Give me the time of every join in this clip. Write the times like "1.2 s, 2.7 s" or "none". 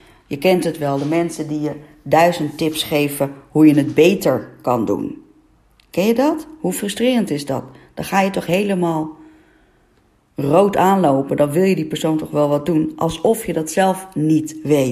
none